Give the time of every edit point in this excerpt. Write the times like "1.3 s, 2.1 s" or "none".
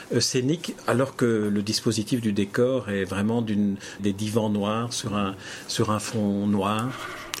4.0 s